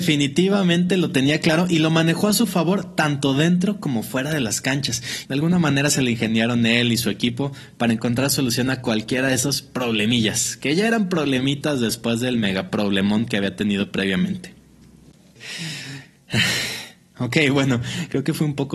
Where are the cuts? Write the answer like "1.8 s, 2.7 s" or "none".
5.3 s, 15.4 s